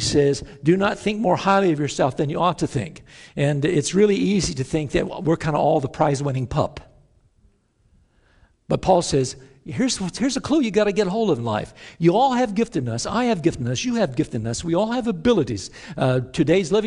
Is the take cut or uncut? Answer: uncut